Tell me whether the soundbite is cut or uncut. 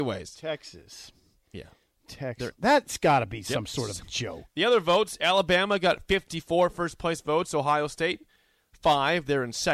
cut